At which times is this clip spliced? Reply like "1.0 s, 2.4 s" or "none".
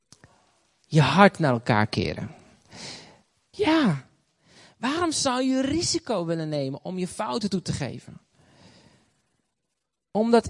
3.5 s